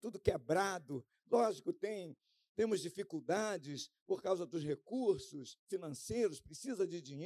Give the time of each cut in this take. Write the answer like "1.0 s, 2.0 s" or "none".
1.2 s